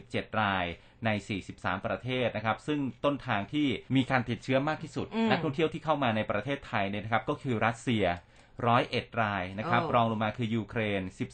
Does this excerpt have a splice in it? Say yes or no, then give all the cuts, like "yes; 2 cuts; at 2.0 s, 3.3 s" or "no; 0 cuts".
yes; 1 cut; at 3.9 s